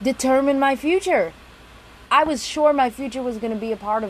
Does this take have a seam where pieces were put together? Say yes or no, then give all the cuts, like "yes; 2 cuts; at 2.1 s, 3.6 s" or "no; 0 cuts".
yes; 1 cut; at 2.1 s